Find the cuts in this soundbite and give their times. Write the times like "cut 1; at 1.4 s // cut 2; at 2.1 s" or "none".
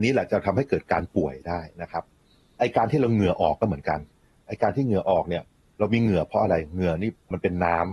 none